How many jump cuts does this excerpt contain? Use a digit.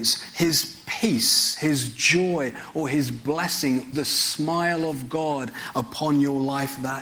1